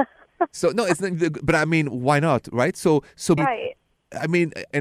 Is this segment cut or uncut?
cut